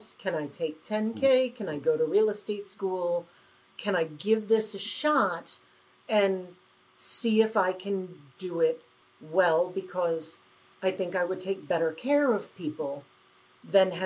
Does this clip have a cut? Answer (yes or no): no